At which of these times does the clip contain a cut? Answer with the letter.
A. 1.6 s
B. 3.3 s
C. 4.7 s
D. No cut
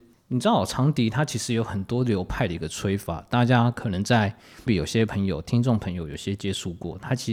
C